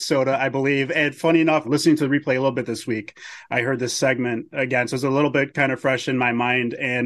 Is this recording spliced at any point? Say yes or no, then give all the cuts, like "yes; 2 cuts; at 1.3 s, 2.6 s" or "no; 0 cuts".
yes; 1 cut; at 1.6 s